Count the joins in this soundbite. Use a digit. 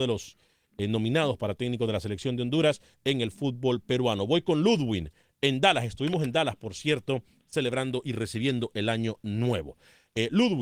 0